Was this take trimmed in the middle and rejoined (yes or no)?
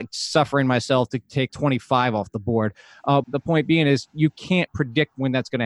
yes